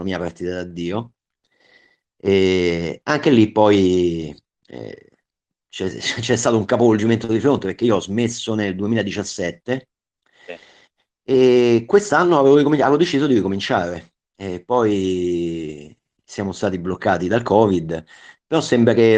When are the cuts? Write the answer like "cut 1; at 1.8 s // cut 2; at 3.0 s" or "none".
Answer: none